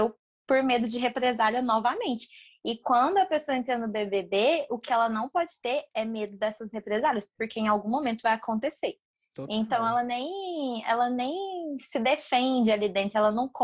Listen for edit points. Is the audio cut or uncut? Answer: uncut